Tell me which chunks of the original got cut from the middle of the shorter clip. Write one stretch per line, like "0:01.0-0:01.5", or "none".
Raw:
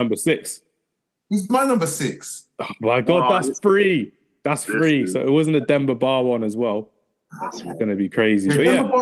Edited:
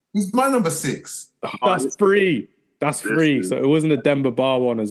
0:02.8-0:03.3